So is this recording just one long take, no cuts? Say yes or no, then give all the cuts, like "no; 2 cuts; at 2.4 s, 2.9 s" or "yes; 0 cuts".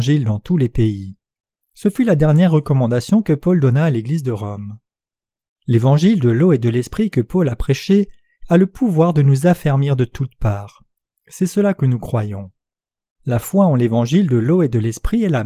yes; 0 cuts